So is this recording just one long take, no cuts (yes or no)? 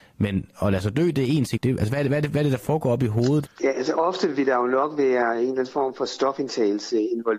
no